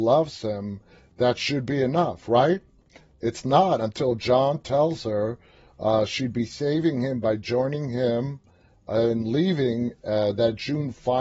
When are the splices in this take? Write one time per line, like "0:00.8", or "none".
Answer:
none